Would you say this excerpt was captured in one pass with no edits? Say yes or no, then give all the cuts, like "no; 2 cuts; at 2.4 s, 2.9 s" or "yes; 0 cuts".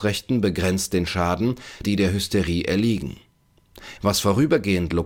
no; 2 cuts; at 1.8 s, 4.0 s